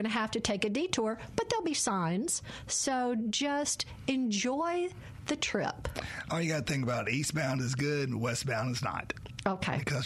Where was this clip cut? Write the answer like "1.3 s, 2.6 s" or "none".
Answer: none